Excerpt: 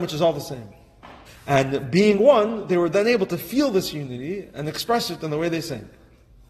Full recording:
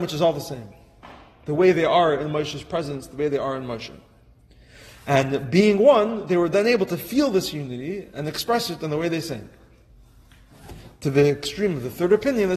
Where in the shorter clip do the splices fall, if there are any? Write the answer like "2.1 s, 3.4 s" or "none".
1.3 s